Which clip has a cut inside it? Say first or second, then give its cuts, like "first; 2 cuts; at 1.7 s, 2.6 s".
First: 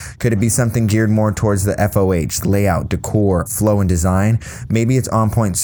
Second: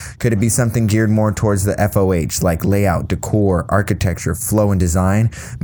first; 2 cuts; at 2.4 s, 3.5 s